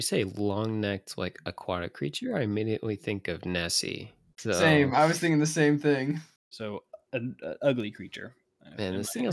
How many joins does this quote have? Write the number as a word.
two